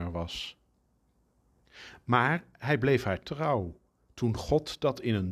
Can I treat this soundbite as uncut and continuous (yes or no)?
yes